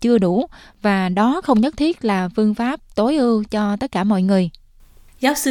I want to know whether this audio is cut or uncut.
uncut